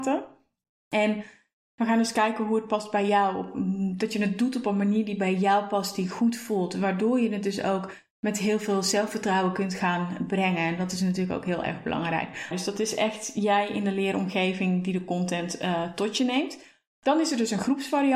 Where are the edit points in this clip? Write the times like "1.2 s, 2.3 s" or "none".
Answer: 12.5 s